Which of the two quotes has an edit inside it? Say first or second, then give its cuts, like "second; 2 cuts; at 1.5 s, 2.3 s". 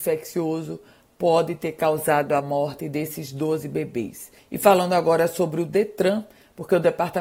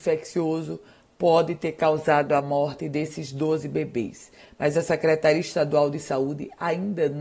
first; 1 cut; at 4.4 s